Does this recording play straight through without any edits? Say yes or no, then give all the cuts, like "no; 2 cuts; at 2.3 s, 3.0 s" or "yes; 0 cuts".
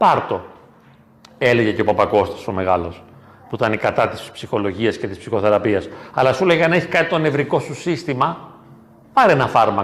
yes; 0 cuts